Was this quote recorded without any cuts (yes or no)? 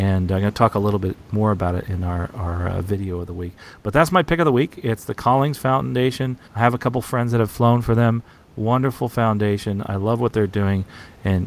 no